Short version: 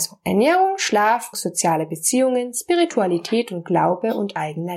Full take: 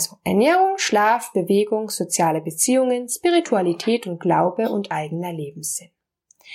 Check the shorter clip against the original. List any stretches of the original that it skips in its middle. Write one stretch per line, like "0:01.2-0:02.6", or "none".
0:01.3-0:01.9